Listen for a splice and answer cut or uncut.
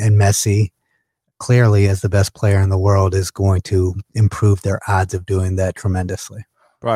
uncut